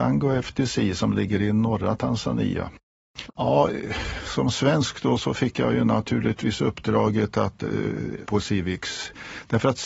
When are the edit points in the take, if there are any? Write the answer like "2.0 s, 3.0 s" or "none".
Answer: 3.3 s, 8.2 s